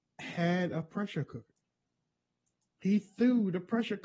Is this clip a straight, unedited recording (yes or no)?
yes